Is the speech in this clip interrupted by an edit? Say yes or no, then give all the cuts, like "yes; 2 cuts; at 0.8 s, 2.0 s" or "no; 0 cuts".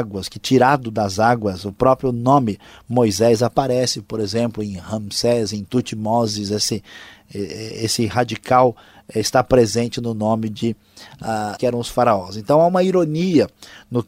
yes; 1 cut; at 11.6 s